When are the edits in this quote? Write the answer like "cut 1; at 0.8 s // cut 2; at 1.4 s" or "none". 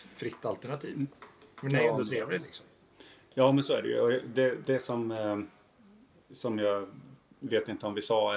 none